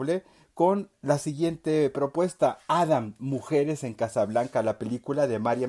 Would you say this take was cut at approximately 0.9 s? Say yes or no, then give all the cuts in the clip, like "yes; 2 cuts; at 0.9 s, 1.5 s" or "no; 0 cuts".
yes; 1 cut; at 0.9 s